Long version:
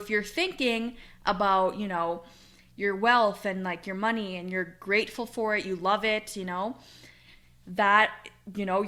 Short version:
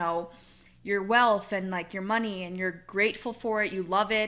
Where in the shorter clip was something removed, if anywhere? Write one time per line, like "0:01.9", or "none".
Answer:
none